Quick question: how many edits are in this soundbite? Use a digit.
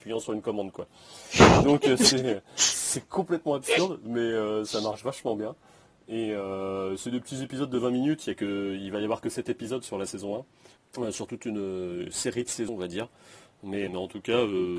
2